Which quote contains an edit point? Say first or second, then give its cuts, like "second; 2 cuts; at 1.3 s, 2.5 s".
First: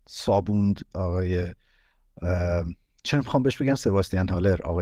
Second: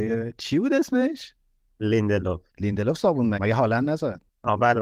second; 1 cut; at 3.3 s